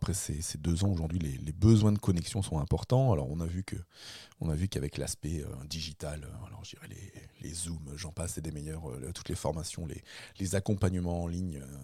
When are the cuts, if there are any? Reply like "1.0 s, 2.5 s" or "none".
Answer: none